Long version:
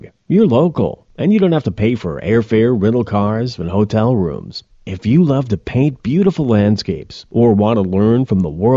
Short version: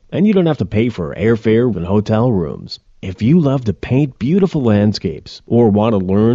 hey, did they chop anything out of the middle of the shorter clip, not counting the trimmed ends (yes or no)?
yes